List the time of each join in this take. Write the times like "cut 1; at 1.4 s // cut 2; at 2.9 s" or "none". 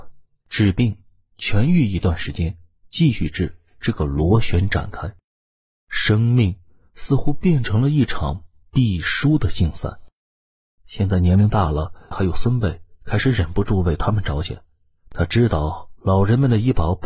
cut 1; at 10.8 s // cut 2; at 12.1 s